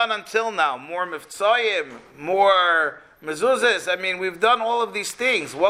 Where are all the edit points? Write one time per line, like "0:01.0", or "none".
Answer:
none